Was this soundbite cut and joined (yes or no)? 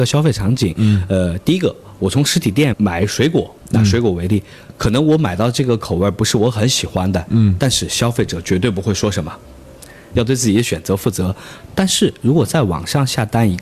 yes